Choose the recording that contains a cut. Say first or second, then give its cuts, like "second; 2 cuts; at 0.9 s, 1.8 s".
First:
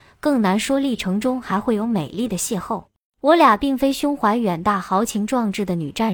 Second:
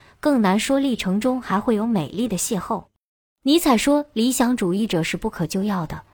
first; 1 cut; at 3.1 s